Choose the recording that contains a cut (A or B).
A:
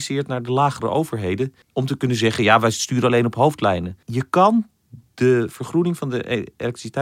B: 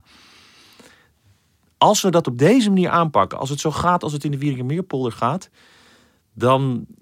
A